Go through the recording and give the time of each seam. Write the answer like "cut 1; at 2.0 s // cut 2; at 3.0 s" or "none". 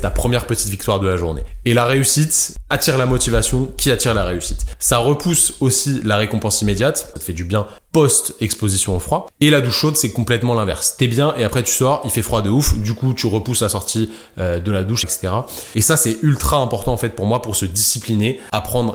cut 1; at 7.1 s // cut 2; at 15.0 s